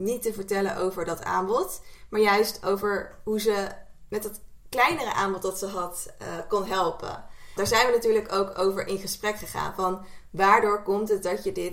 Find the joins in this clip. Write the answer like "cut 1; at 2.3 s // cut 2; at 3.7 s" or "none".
cut 1; at 7.6 s

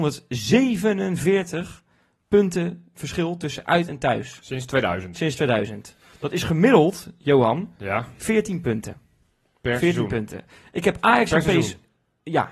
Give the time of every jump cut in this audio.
none

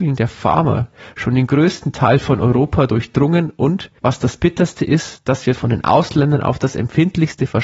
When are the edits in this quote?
cut 1; at 4.0 s

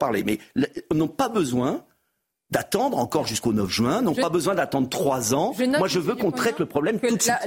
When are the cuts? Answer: none

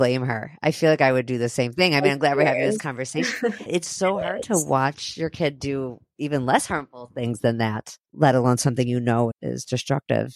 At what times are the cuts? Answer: cut 1; at 3.7 s // cut 2; at 9.3 s

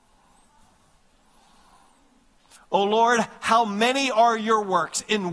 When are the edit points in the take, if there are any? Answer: cut 1; at 2.5 s

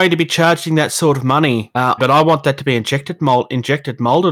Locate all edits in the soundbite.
cut 1; at 2.0 s

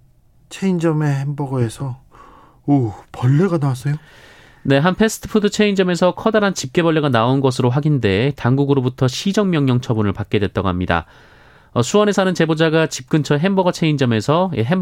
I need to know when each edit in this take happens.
none

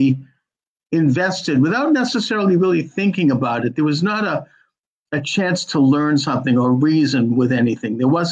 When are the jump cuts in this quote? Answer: none

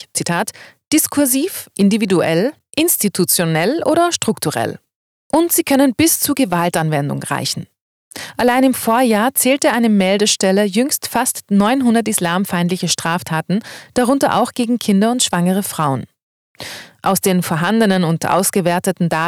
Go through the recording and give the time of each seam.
none

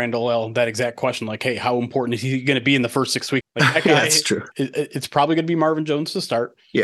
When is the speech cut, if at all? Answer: cut 1; at 3.4 s // cut 2; at 4.5 s

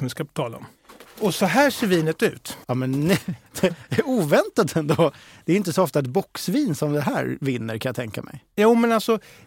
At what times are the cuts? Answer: cut 1; at 2.6 s

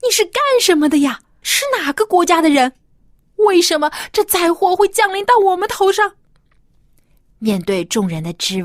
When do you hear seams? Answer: cut 1; at 1.4 s

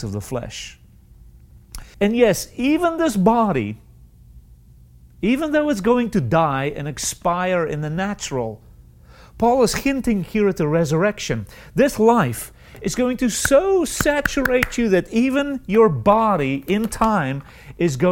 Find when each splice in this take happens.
cut 1; at 1.9 s

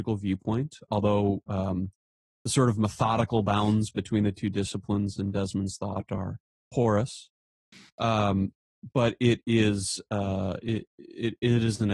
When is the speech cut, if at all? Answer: none

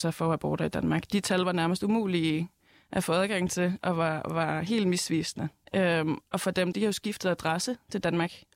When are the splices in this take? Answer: cut 1; at 5.6 s // cut 2; at 6.7 s

